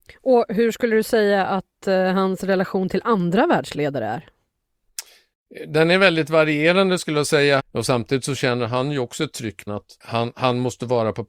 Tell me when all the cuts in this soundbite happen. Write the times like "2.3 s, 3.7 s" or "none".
7.6 s, 9.7 s